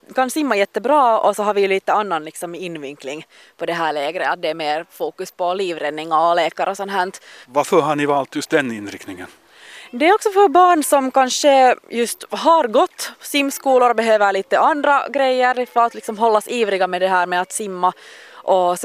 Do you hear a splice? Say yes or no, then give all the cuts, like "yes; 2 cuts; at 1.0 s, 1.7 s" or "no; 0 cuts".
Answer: yes; 1 cut; at 7.4 s